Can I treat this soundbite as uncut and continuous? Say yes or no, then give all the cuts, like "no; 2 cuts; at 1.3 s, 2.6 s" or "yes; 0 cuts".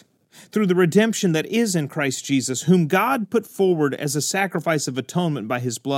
yes; 0 cuts